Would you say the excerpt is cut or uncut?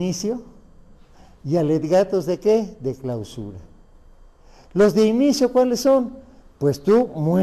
uncut